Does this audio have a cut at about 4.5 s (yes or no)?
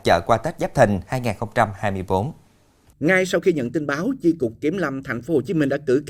no